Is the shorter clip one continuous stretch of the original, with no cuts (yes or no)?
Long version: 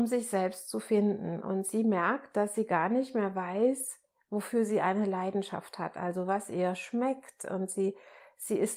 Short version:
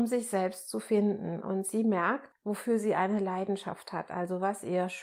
no